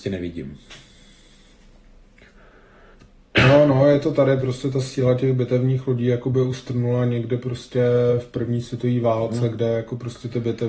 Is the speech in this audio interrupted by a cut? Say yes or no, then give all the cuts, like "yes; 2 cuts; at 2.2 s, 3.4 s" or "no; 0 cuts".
no; 0 cuts